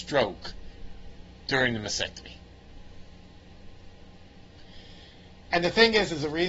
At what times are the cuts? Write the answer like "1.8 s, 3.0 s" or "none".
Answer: 5.5 s